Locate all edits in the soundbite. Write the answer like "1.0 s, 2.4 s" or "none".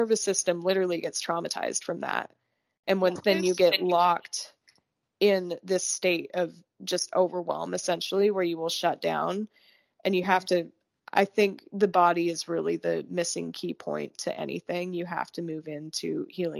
3.2 s, 11.0 s